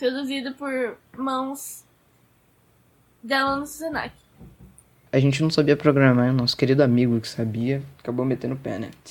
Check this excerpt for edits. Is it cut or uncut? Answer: cut